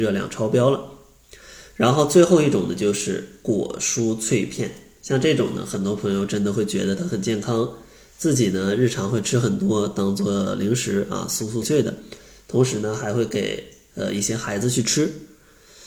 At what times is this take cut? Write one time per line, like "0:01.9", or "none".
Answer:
0:11.6